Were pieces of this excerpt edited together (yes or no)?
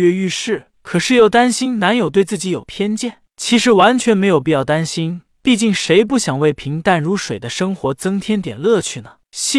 no